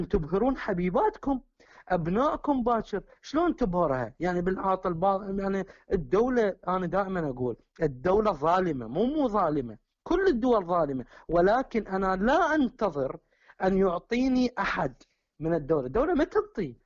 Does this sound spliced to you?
no; 0 cuts

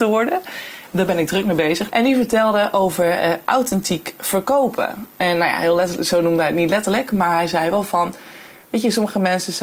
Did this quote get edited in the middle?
yes; 1 cut; at 1.9 s

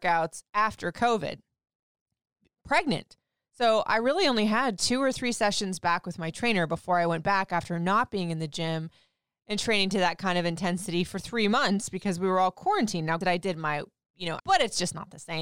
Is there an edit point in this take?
yes; 2 cuts; at 13.2 s, 14.4 s

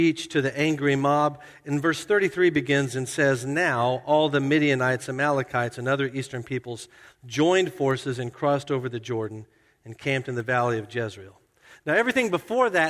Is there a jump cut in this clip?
no; 0 cuts

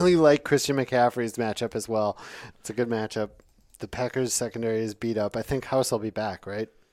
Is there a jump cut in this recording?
yes; 1 cut; at 2.5 s

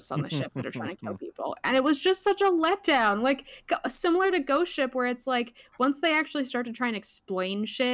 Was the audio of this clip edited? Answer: no; 0 cuts

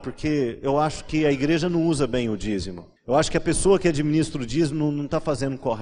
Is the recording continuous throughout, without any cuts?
no; 1 cut; at 3.0 s

